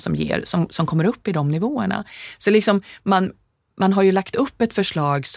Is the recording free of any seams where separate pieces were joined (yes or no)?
yes